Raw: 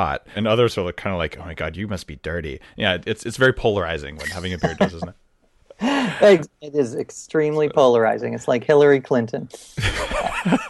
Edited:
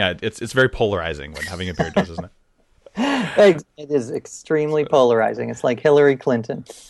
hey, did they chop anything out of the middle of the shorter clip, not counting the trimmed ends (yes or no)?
no